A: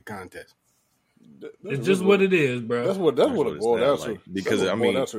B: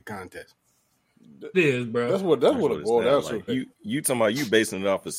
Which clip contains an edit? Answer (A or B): B